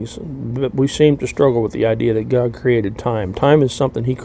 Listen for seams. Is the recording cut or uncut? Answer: uncut